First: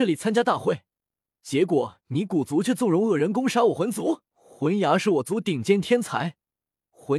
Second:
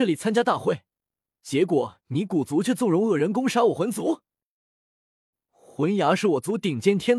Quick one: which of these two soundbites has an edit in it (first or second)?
first